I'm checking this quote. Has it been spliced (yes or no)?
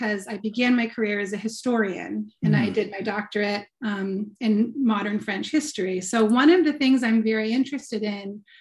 no